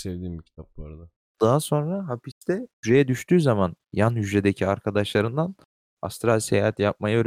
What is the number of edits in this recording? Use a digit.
2